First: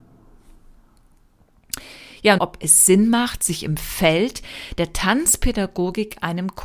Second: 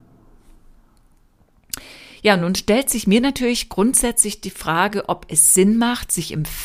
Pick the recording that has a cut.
first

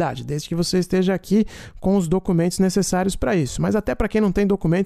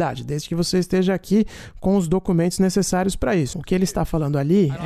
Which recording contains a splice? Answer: second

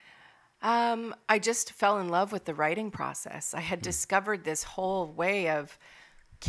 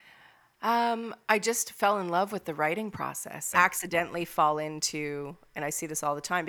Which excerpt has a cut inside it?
second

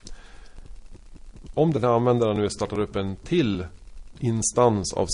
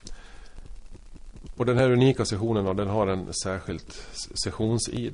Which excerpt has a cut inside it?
first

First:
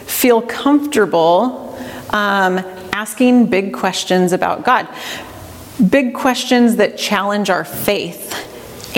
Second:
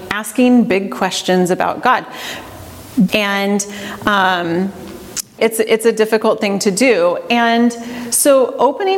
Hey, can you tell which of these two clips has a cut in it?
second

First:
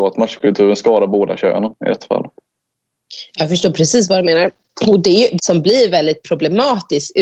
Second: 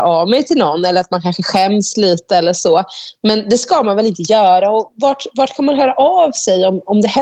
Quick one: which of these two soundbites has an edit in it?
first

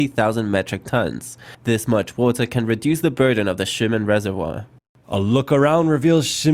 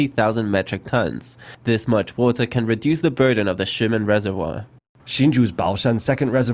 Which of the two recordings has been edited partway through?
second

